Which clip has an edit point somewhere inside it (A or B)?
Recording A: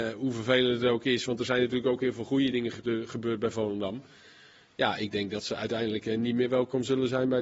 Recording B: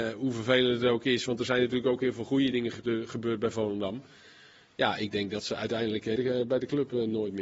B